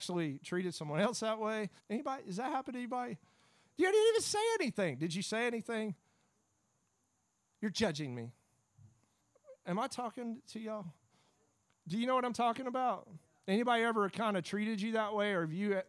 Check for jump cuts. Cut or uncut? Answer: cut